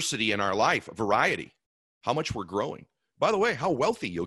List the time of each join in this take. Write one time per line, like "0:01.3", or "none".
0:01.9